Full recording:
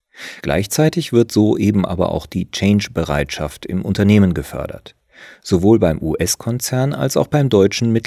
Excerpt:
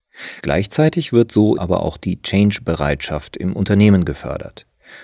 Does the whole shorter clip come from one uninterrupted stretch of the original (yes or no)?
no